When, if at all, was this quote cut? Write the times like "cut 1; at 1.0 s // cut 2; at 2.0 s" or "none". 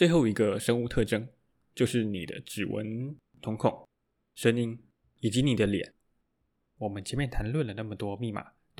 none